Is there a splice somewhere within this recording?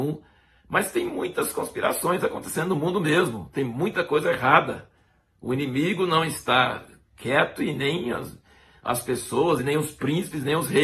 no; 0 cuts

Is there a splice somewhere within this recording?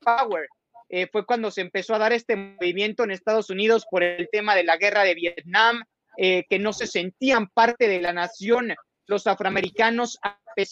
no; 0 cuts

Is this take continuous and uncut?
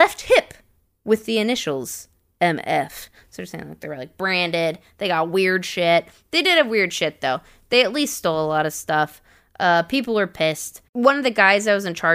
no; 1 cut; at 10.8 s

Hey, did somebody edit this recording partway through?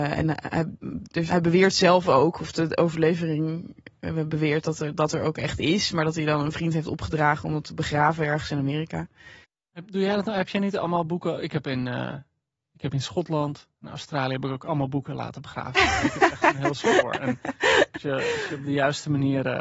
yes; 1 cut; at 1.3 s

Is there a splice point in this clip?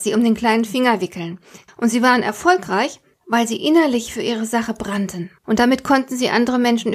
yes; 2 cuts; at 1.7 s, 5.4 s

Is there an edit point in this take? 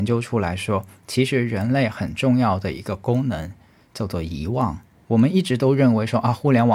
yes; 1 cut; at 5.0 s

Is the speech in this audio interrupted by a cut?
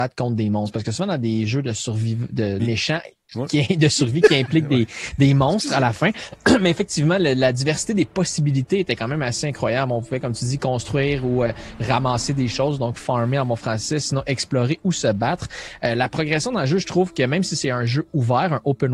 yes; 1 cut; at 2.6 s

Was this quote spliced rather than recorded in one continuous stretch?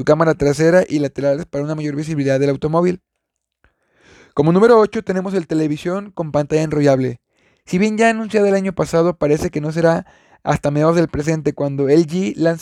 no; 0 cuts

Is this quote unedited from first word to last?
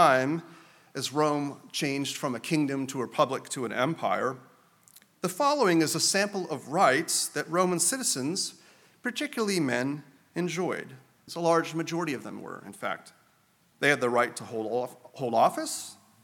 no; 2 cuts; at 11.3 s, 13.7 s

